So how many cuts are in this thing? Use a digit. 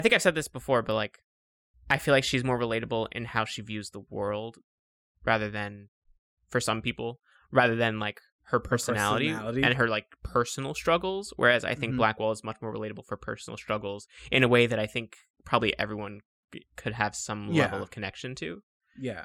0